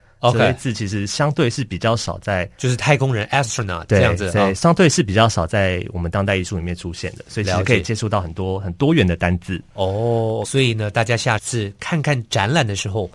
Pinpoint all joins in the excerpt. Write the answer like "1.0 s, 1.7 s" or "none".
4.6 s, 10.4 s